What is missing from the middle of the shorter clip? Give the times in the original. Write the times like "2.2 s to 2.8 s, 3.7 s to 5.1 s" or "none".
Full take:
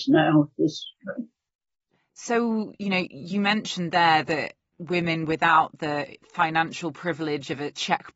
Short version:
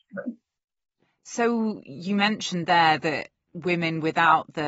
2.7 s to 3.1 s